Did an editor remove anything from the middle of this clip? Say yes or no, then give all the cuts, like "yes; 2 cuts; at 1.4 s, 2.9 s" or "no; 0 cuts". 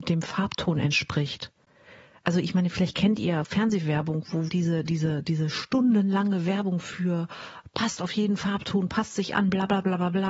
yes; 1 cut; at 4.5 s